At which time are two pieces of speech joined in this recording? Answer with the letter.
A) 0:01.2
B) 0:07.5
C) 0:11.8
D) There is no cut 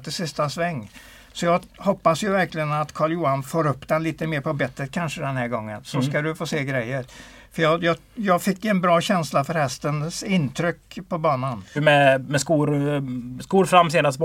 C